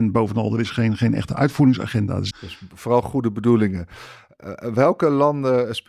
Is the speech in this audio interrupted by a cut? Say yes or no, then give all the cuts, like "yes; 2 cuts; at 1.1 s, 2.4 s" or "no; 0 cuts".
yes; 1 cut; at 2.3 s